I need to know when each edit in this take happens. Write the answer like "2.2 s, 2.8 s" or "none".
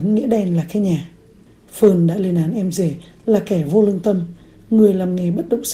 none